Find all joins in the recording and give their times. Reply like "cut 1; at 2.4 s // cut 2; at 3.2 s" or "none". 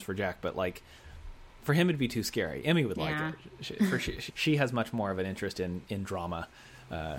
cut 1; at 4.3 s